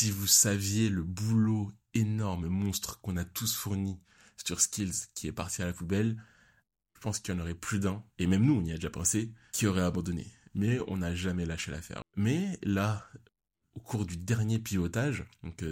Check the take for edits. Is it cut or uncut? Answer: cut